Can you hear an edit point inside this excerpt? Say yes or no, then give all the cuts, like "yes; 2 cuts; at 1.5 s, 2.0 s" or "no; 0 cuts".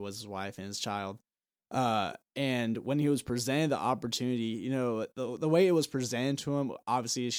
no; 0 cuts